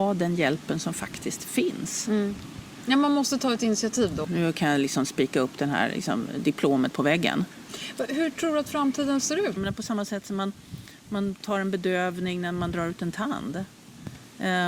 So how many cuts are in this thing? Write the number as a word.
two